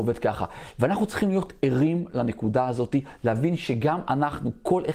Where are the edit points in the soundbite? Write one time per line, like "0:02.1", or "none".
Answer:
none